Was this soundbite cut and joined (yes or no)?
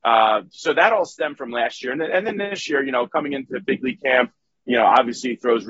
no